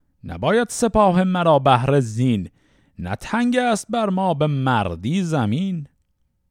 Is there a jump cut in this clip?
no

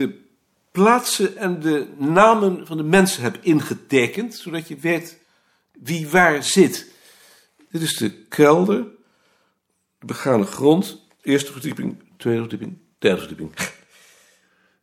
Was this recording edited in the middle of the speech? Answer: no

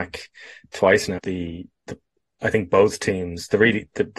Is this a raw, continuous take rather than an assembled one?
no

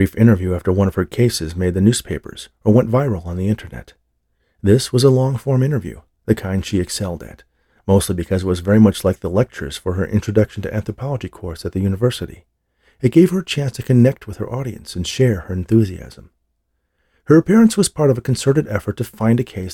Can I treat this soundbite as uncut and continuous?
yes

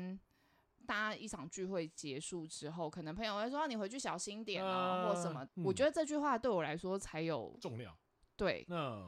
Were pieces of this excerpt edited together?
yes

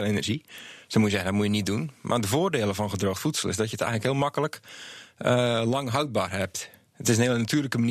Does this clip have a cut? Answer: no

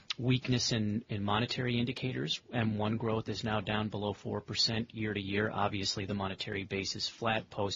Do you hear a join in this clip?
no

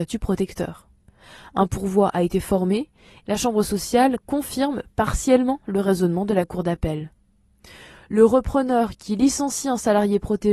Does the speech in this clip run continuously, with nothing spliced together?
no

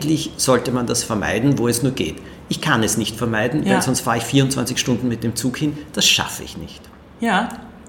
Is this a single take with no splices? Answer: yes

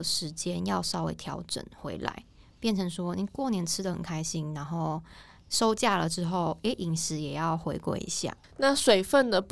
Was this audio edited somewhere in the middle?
no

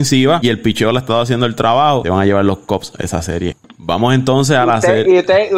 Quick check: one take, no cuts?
no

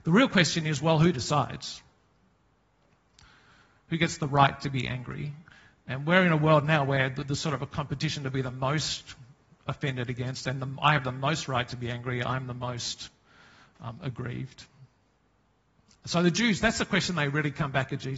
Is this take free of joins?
yes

